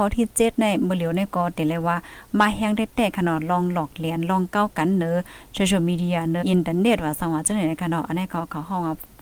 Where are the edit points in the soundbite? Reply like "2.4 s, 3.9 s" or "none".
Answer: 6.4 s